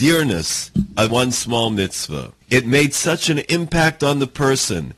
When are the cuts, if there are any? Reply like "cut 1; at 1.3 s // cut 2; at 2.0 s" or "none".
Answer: cut 1; at 1.1 s // cut 2; at 2.4 s